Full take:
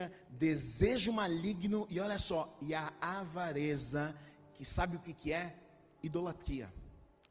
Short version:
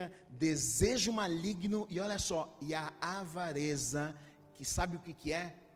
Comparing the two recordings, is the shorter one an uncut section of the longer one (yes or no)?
yes